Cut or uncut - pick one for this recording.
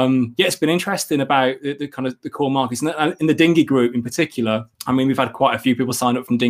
cut